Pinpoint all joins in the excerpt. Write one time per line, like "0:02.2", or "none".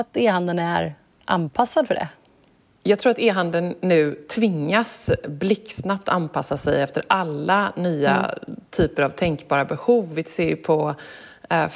none